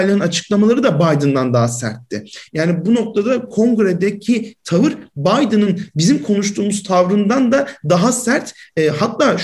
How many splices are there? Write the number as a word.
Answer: one